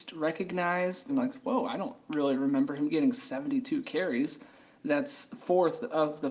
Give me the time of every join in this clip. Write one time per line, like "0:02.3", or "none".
0:01.1